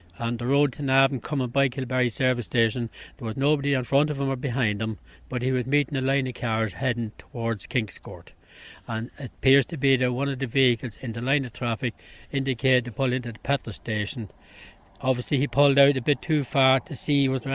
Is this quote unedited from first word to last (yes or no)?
yes